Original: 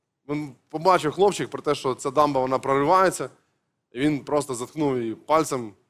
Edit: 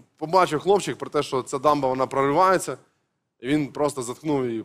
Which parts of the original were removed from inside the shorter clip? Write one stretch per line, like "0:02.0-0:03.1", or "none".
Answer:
none